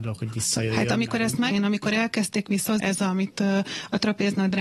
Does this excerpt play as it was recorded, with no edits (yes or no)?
no